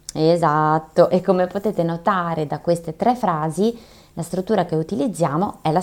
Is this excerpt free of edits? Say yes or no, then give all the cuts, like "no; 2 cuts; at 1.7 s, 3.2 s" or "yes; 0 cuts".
yes; 0 cuts